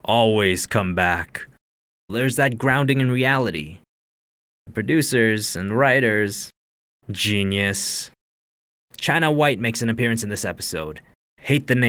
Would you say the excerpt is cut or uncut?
cut